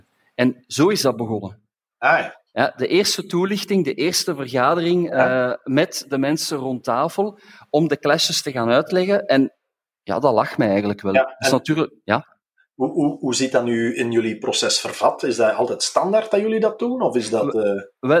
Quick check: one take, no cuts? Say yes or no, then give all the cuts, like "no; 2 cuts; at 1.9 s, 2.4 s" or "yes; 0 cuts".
yes; 0 cuts